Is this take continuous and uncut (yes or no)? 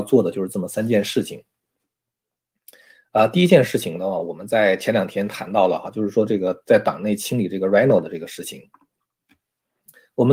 yes